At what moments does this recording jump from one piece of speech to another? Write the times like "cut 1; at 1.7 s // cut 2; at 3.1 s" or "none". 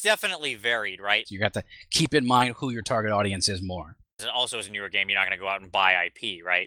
cut 1; at 1.3 s // cut 2; at 4.2 s

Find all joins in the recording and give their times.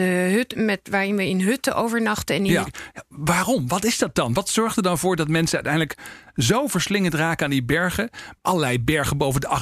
cut 1; at 2.7 s // cut 2; at 8.4 s

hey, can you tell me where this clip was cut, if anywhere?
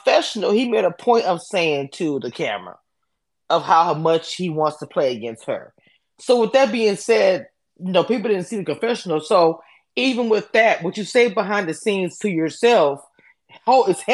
none

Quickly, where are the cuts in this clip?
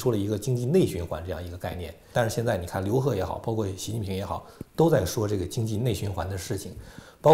cut 1; at 2.1 s

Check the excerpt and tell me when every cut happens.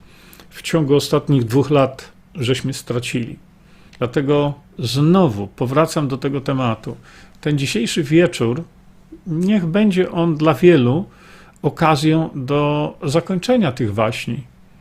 cut 1; at 3.9 s

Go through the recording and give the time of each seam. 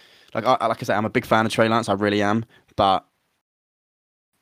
none

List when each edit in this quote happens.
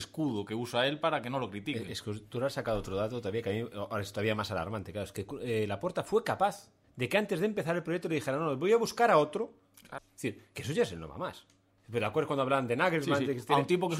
cut 1; at 6.8 s // cut 2; at 10.0 s

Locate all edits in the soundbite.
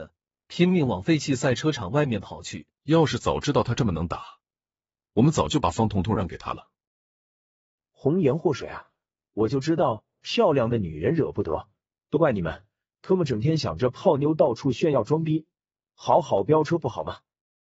cut 1; at 2.8 s

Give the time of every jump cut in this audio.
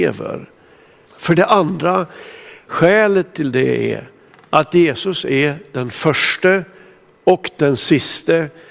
cut 1; at 1.1 s

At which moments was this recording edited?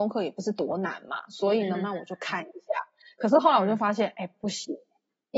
cut 1; at 1.7 s

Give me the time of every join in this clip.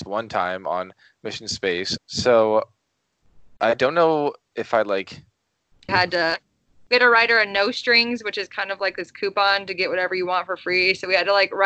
cut 1; at 2.0 s // cut 2; at 5.9 s

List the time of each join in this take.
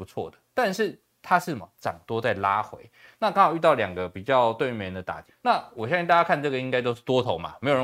cut 1; at 5.3 s

